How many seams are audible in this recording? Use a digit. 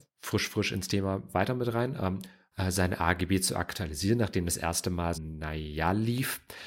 2